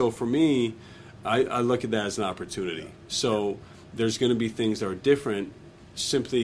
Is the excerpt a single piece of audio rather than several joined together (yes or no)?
yes